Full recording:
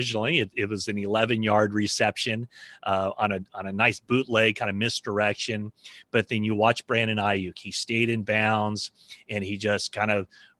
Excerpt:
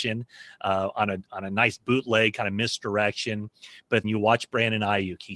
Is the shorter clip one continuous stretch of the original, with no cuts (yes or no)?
no